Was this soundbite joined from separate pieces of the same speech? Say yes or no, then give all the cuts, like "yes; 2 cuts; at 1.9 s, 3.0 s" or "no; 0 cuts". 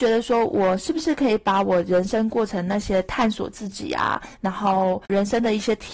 no; 0 cuts